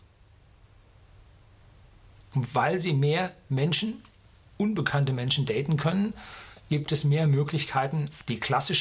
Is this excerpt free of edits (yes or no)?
yes